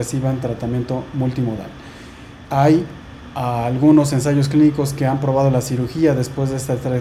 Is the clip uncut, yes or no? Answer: no